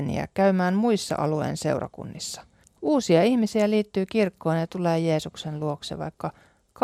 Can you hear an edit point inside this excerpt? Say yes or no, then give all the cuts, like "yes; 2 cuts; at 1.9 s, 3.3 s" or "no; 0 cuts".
yes; 1 cut; at 2.6 s